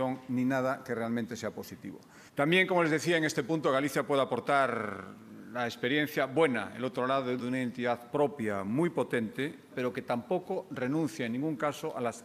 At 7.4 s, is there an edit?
yes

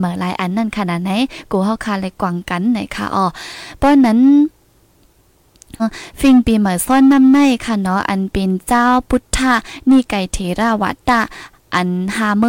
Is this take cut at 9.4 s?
no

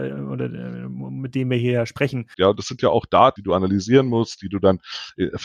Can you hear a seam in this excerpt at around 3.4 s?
yes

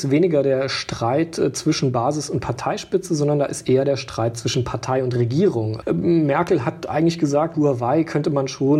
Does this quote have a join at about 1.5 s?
no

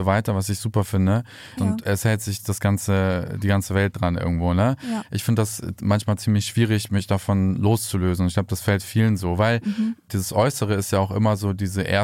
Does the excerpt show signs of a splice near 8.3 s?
no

